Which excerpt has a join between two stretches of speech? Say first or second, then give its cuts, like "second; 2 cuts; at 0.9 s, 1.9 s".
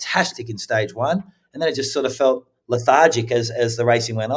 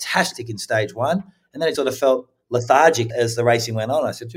second; 2 cuts; at 1.8 s, 3.1 s